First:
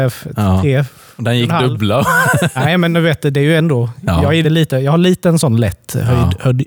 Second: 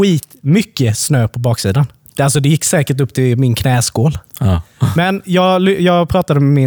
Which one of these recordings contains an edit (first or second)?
first